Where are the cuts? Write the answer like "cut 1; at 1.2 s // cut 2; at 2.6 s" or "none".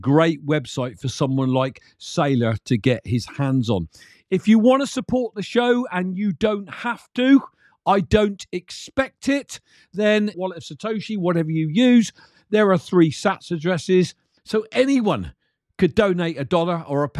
cut 1; at 10.3 s // cut 2; at 14.4 s